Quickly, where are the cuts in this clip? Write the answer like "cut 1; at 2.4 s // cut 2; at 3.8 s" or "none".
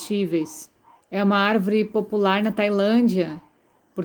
cut 1; at 1.0 s